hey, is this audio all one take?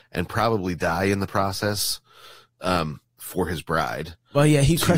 yes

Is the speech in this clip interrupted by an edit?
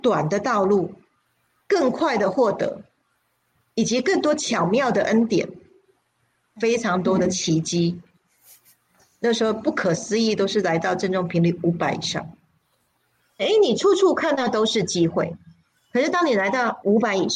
yes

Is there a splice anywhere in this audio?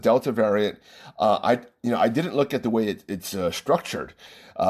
no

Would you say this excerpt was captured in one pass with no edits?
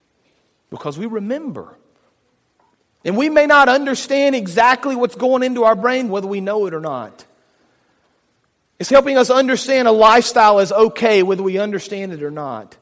no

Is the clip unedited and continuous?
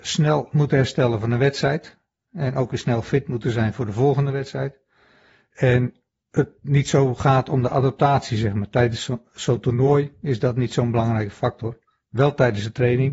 yes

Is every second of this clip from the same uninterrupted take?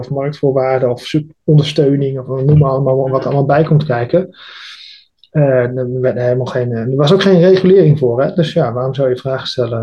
yes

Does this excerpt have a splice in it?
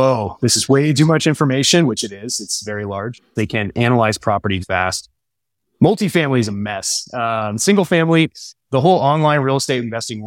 yes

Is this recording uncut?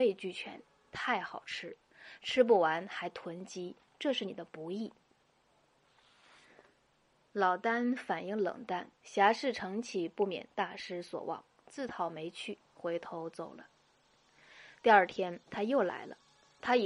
no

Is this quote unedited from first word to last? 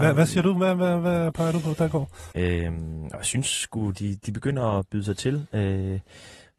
no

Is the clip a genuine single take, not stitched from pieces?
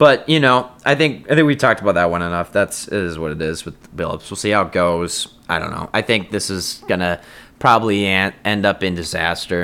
yes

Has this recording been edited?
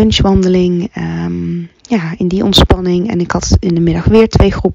no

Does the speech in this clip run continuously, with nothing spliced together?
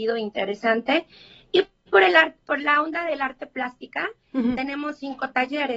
yes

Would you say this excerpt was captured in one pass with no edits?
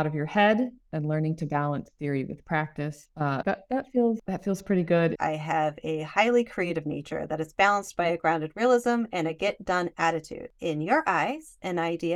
no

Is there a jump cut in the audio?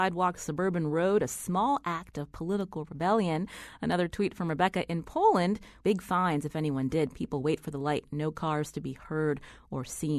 yes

